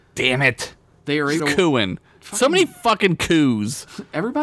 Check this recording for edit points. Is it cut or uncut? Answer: cut